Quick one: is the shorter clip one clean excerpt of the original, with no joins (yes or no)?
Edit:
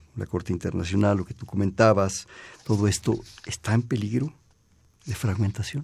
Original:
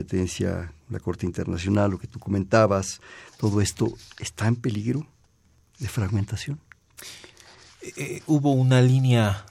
yes